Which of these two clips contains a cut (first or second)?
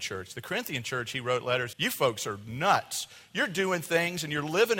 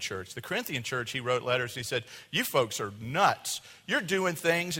first